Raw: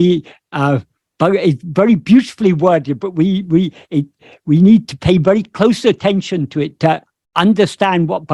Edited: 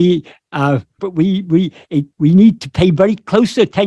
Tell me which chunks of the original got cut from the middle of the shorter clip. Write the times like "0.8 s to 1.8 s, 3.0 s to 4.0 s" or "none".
1.0 s to 3.0 s, 4.1 s to 4.4 s